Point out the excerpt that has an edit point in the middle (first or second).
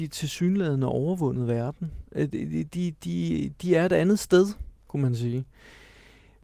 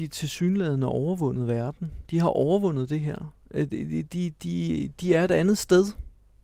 first